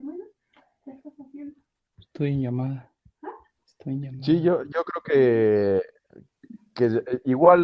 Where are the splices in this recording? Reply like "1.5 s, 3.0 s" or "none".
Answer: none